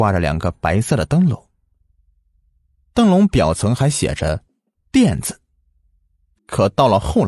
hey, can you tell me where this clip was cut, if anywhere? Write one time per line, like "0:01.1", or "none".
0:06.3